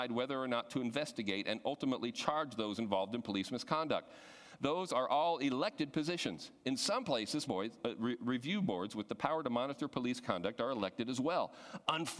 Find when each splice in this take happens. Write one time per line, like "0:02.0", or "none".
0:07.5